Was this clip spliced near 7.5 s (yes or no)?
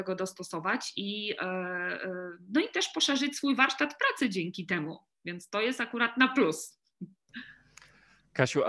no